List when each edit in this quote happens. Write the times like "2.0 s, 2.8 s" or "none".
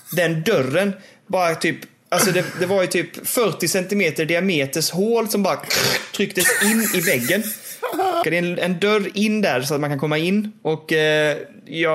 8.2 s

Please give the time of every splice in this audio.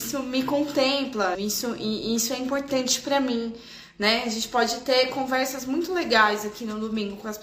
1.3 s

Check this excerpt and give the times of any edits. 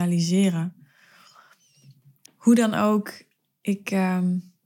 2.3 s

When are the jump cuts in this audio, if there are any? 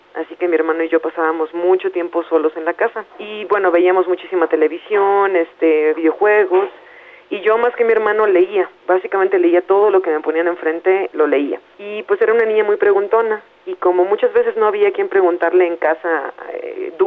3.1 s, 5.9 s

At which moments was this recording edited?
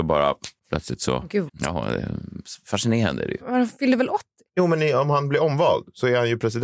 1.5 s

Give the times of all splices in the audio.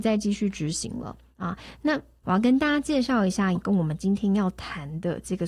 3.6 s

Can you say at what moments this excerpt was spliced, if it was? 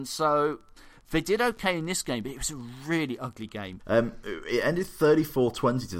3.8 s

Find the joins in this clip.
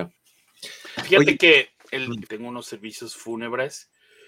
2.3 s

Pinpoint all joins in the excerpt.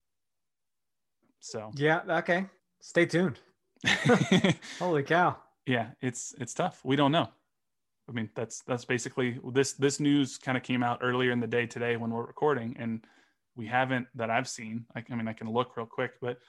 2.6 s

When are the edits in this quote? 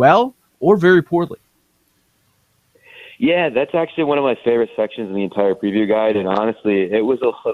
none

